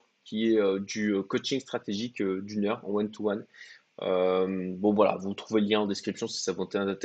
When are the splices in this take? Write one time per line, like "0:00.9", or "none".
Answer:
none

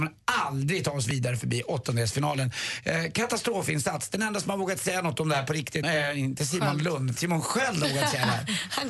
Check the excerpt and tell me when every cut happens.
0:05.8
0:07.2

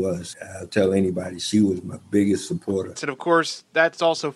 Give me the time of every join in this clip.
0:03.0

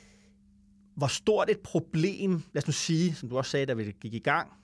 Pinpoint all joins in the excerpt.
0:02.5

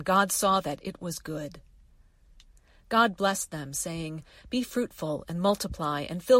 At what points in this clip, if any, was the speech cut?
none

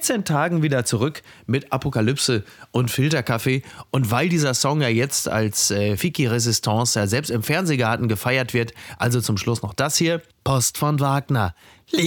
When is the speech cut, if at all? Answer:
0:06.0
0:10.3

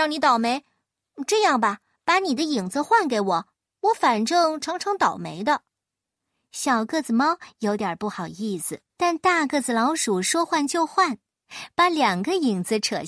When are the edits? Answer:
0:08.9

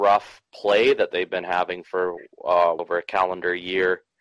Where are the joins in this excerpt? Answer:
0:02.8

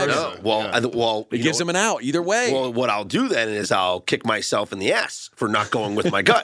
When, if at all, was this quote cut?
none

